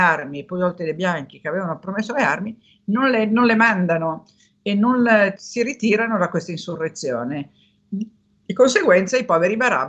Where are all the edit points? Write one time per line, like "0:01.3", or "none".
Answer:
0:05.4